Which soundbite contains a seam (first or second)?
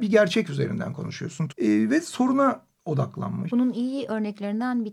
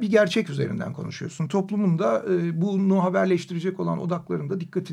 first